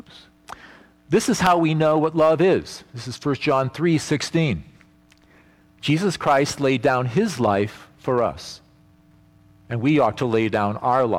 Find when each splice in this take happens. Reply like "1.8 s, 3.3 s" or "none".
none